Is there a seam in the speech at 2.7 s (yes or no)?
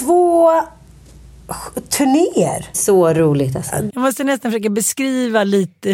yes